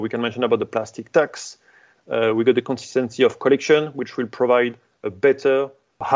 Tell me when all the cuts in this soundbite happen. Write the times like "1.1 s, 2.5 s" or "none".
none